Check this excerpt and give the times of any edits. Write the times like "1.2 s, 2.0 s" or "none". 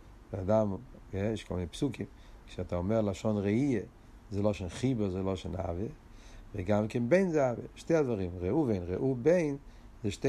none